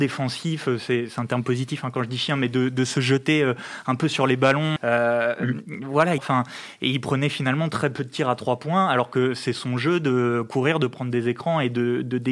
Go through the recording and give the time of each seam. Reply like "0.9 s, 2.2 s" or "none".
4.8 s, 6.2 s